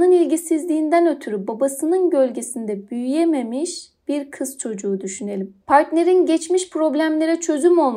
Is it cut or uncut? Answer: cut